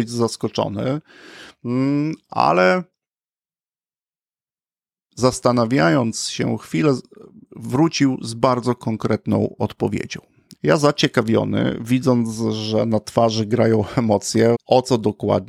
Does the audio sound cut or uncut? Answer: cut